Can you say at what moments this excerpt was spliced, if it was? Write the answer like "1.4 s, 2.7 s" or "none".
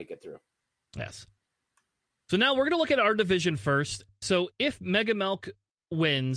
none

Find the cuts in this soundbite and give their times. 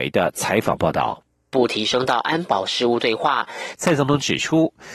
1.5 s, 3.8 s

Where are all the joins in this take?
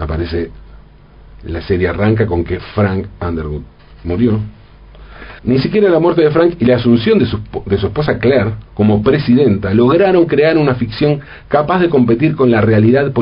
5.4 s, 8.7 s

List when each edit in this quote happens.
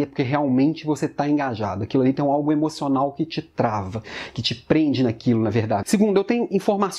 5.8 s

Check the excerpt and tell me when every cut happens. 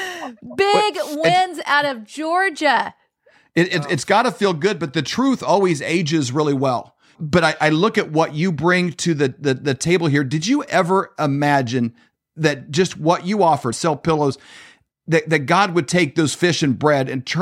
7.2 s, 13.7 s

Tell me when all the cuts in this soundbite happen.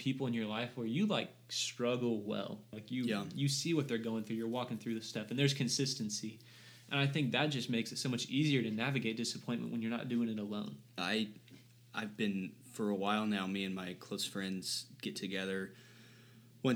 2.7 s, 11.0 s

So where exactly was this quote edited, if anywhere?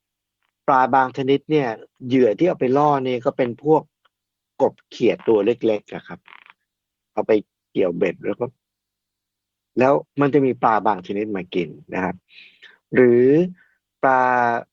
10.1 s

